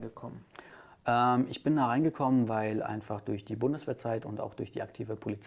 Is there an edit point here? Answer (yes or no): no